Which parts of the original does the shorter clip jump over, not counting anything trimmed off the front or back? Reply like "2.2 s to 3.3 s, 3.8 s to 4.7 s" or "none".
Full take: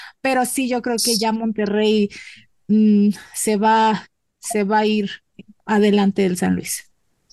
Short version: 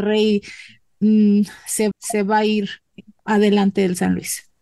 3.6 s to 4.3 s